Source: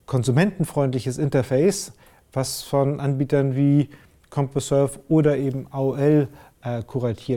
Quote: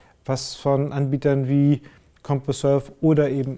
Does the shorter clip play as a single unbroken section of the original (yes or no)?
yes